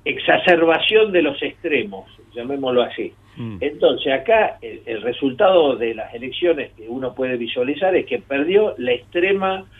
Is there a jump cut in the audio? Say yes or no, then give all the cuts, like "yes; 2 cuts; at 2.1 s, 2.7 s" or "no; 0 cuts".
yes; 1 cut; at 4.6 s